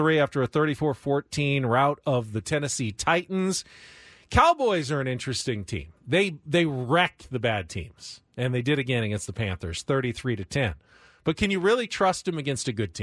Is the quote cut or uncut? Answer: uncut